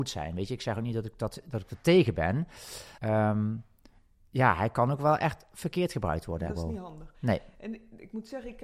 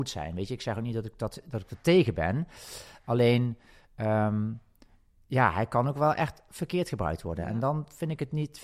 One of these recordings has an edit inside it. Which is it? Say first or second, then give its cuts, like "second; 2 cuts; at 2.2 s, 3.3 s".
first; 2 cuts; at 3.0 s, 6.5 s